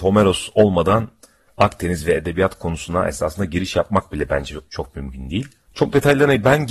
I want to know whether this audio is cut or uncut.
cut